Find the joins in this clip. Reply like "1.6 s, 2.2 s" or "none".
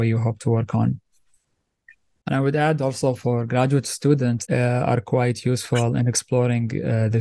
2.2 s, 4.5 s